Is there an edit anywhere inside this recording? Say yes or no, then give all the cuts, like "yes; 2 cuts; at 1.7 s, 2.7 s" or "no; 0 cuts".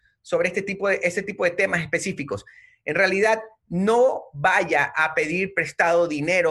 no; 0 cuts